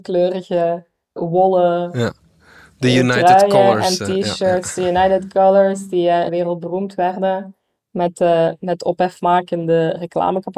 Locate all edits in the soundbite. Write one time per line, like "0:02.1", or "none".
0:06.3